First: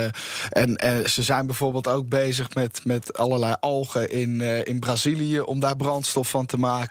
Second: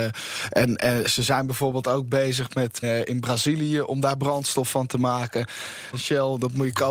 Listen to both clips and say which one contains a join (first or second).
second